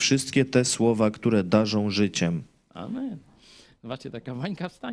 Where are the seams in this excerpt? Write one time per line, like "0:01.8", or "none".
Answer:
none

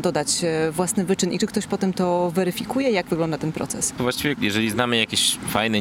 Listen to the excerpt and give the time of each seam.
0:04.0

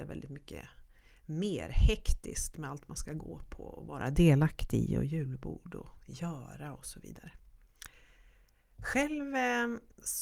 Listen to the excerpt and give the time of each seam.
none

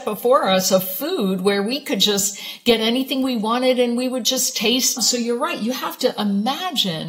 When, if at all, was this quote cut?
0:05.0

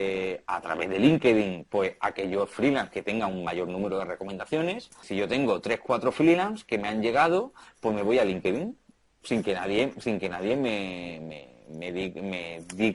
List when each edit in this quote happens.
0:05.0

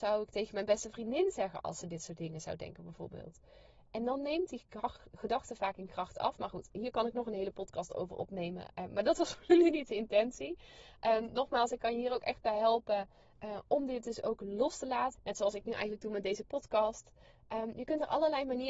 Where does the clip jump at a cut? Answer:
0:15.2

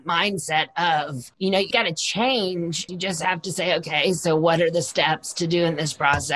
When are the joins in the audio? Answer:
0:01.7
0:02.9

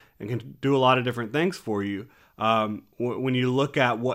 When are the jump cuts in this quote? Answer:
none

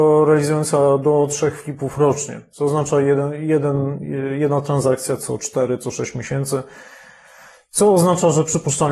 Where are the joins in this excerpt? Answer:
none

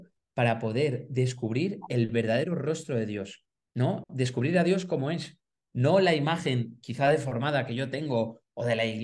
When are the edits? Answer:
none

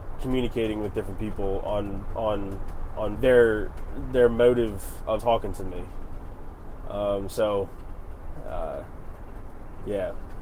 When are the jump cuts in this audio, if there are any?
0:03.1
0:05.2

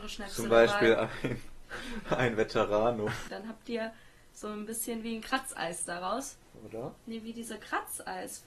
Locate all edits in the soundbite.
0:03.3
0:06.5

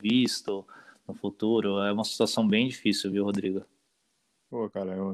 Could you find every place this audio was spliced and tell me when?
none

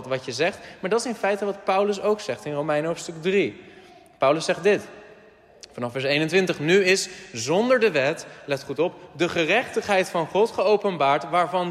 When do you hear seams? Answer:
none

